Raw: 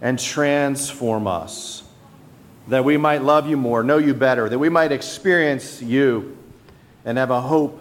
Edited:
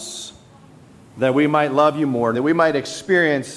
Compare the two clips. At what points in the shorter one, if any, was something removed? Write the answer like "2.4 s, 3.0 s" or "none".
2.3 s